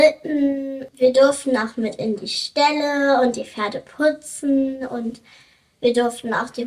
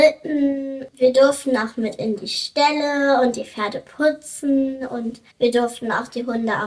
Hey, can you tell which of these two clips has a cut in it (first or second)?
second